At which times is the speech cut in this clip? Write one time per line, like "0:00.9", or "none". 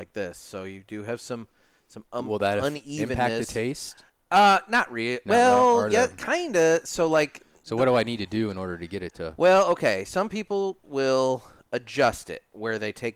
none